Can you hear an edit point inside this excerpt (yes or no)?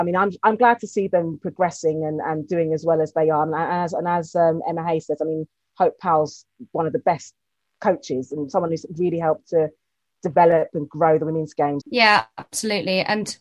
yes